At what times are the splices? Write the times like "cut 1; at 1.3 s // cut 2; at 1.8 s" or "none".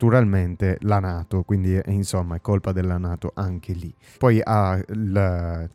cut 1; at 4.1 s